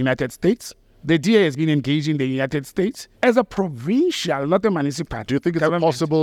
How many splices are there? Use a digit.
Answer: 1